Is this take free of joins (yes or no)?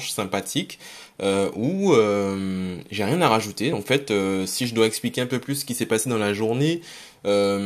yes